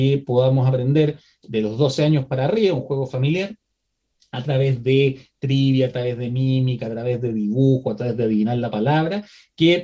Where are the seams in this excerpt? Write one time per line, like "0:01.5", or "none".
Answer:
none